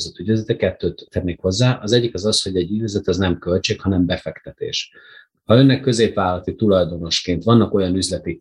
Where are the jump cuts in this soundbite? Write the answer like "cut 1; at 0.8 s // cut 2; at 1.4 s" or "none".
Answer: none